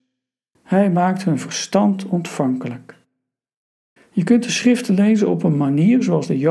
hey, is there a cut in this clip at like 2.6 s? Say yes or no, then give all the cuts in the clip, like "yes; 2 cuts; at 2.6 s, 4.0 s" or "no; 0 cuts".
no; 1 cut; at 4.0 s